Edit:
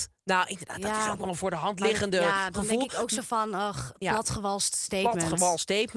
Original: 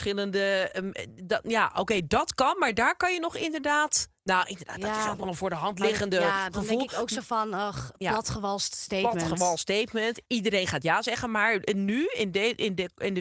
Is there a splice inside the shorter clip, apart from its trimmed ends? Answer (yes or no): no